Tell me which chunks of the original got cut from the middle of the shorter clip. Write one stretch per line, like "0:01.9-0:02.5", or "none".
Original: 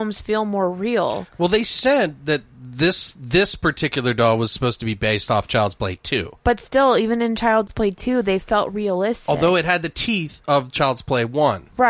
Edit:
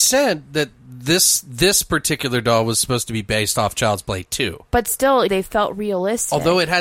0:07.0-0:08.2